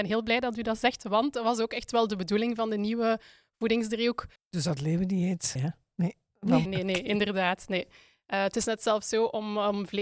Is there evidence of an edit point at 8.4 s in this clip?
no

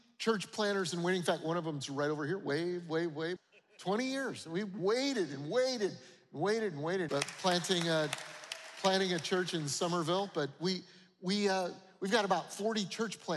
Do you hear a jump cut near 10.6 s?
no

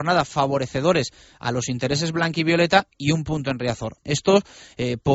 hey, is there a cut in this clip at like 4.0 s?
yes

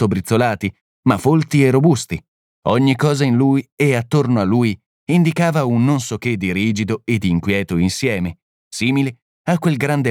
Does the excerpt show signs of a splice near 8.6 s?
no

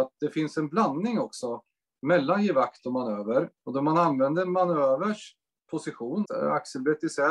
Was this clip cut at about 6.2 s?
yes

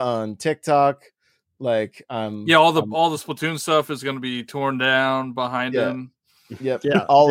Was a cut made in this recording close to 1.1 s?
no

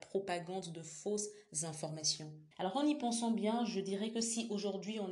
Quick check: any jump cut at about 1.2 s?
no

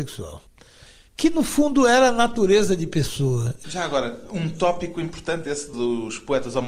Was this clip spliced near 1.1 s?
no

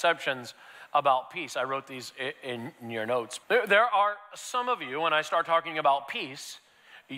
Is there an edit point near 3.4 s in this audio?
yes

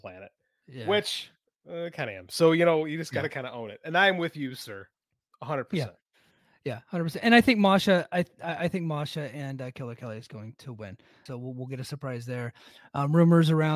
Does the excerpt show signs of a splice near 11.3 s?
yes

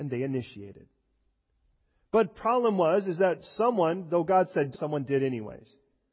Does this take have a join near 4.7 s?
yes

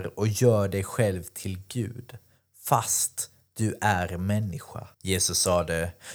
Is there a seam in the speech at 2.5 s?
no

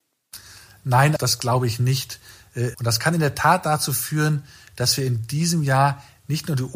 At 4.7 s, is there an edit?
no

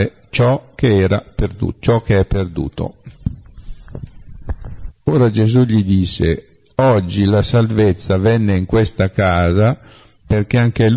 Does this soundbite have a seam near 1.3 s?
no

